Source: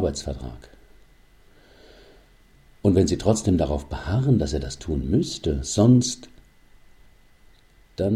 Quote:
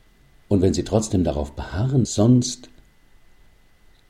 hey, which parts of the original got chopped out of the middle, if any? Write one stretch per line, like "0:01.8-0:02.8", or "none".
0:04.4-0:05.6